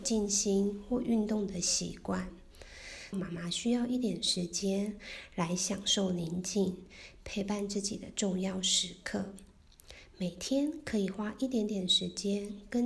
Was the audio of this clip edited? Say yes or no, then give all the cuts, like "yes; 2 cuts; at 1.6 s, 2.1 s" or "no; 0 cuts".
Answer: yes; 1 cut; at 3.1 s